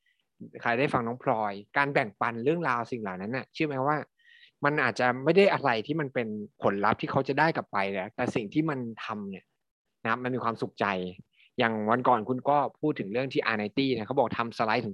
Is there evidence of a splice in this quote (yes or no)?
yes